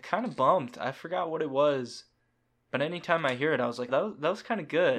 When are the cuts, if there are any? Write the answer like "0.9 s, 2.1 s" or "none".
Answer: 3.9 s